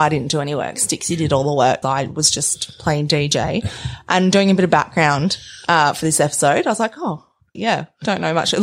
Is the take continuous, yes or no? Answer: no